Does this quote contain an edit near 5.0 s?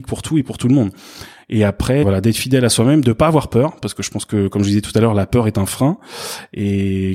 no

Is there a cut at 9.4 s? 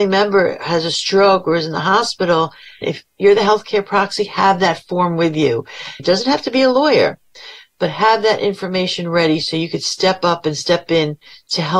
no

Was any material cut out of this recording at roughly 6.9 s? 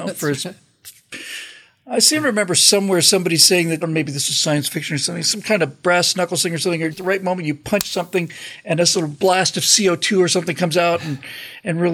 yes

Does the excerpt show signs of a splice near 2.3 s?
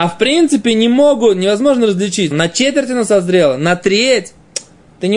yes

